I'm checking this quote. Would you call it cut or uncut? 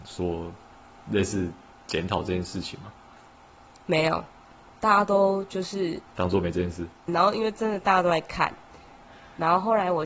cut